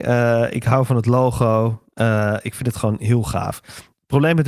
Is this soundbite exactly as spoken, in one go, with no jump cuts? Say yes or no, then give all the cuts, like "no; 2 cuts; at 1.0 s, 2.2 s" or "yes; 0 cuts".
yes; 0 cuts